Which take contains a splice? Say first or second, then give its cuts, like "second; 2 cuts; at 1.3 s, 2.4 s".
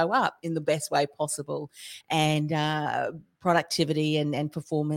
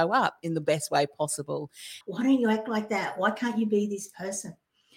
second; 1 cut; at 2.0 s